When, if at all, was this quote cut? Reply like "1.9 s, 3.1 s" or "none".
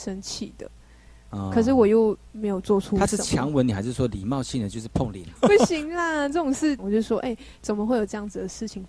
5.4 s, 6.8 s